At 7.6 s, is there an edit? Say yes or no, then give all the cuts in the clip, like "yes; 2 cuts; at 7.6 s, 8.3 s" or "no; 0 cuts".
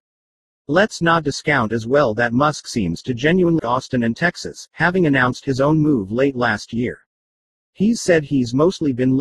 no; 1 cut; at 3.6 s